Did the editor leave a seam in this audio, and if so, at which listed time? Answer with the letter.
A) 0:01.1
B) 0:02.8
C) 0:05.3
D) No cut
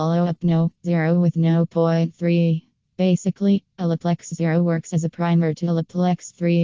B